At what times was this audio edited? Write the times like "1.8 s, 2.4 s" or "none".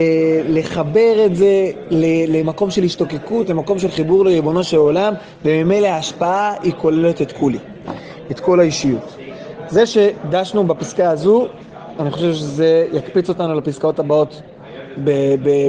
none

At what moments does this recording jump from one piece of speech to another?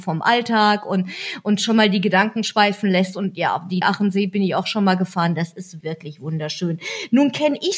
3.8 s, 5.8 s

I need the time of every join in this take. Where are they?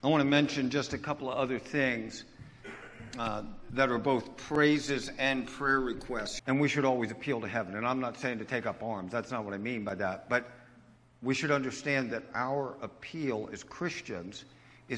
6.4 s

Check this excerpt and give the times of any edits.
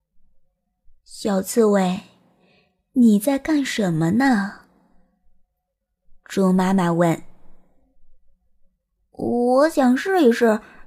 none

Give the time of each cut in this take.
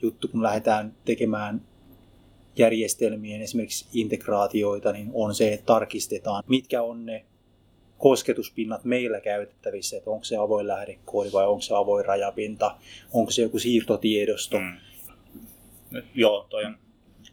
6.4 s, 15.1 s

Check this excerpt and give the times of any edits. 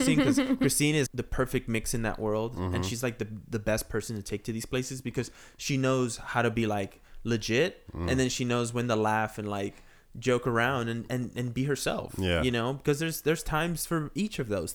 1.1 s

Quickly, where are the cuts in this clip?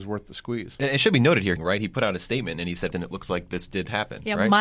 1.6 s, 2.9 s

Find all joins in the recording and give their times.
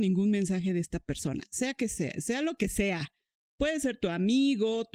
none

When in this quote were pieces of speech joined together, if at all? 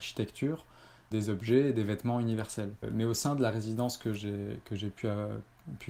2.8 s

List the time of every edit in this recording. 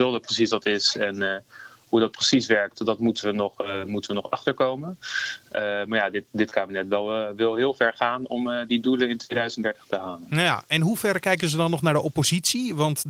none

